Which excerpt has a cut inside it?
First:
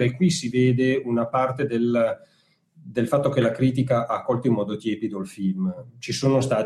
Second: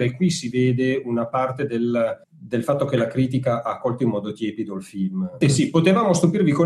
second; 2 cuts; at 2.2 s, 5.4 s

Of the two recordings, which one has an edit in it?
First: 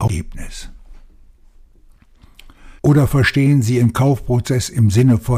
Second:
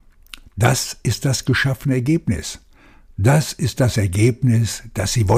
first; 1 cut; at 2.8 s

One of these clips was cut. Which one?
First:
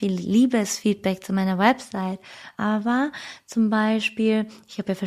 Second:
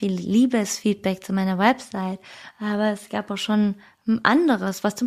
first; 1 cut; at 2.5 s

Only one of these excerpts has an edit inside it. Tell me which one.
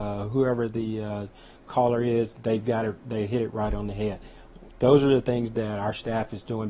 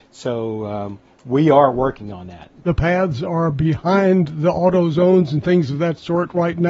second; 1 cut; at 2.6 s

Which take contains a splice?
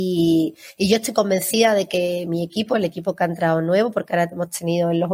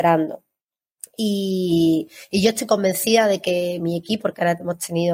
second; 1 cut; at 4.2 s

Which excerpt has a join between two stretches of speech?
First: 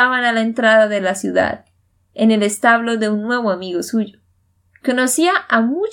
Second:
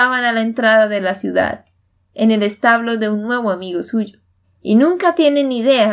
second; 1 cut; at 4.4 s

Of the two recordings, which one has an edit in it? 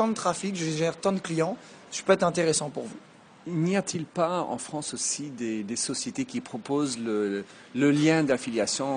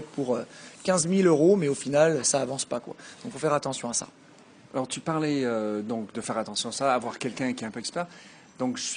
second; 1 cut; at 2.2 s

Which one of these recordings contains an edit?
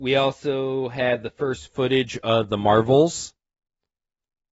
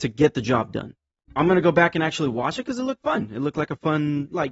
second; 1 cut; at 1.3 s

